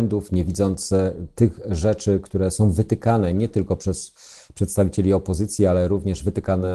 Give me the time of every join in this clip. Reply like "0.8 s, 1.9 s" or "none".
none